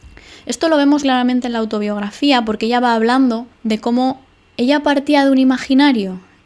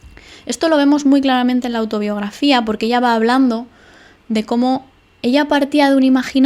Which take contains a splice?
first; 2 cuts; at 1.0 s, 3.5 s

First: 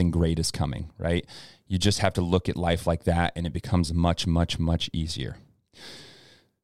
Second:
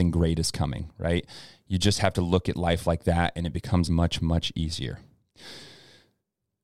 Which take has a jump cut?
second; 1 cut; at 3.9 s

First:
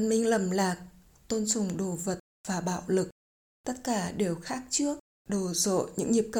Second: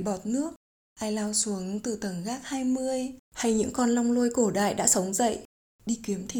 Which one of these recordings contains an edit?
first; 2 cuts; at 3.4 s, 5.2 s

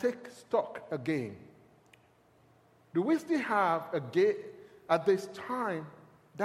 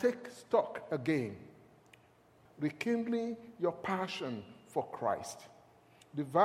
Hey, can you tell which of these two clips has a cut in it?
second; 1 cut; at 2.5 s

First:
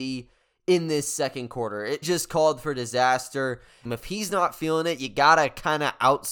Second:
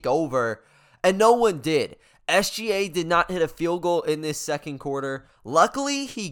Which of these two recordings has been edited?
first; 2 cuts; at 2.0 s, 3.9 s

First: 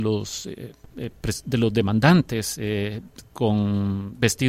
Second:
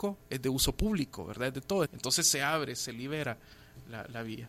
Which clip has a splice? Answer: second; 1 cut; at 1.9 s

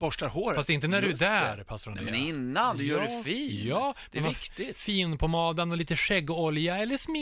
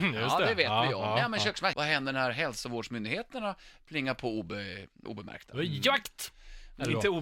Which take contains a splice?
second; 2 cuts; at 1.7 s, 5.1 s

